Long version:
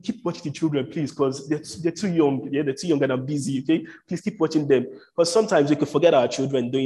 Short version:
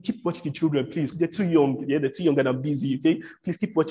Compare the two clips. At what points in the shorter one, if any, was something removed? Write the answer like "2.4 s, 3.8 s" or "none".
1.1 s